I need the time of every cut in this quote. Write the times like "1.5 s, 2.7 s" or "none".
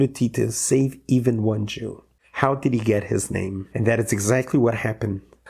2.2 s, 3.7 s